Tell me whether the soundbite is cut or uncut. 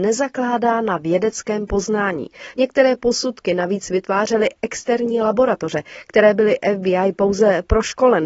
uncut